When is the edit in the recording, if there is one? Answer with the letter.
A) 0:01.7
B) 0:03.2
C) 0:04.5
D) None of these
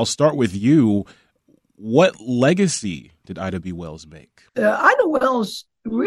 C